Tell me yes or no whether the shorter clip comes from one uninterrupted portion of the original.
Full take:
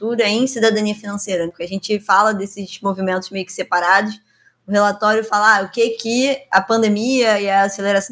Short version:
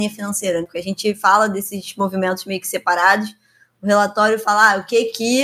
yes